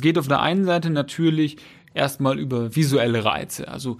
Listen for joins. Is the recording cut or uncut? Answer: uncut